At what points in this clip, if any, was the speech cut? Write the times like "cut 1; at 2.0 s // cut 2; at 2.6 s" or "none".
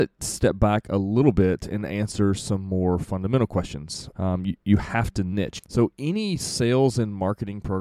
cut 1; at 4.1 s // cut 2; at 5.6 s